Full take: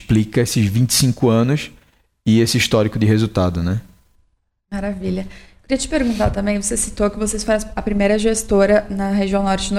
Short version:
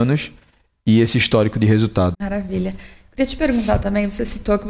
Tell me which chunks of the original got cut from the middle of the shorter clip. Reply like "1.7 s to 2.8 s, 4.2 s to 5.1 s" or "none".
3.5 s to 4.6 s